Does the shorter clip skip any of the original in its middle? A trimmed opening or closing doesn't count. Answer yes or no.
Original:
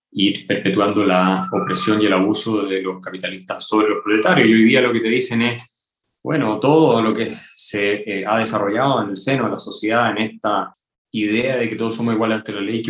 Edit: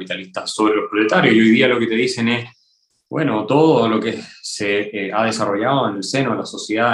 no